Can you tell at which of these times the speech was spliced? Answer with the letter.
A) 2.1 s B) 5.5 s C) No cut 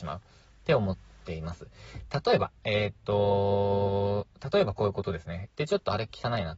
B